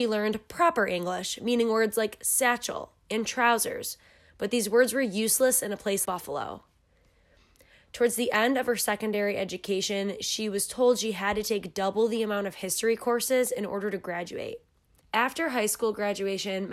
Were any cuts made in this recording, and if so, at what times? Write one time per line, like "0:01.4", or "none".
0:06.1
0:15.0